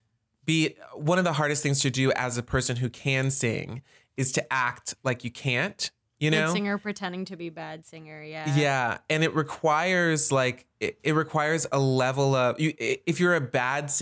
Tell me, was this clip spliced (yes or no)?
no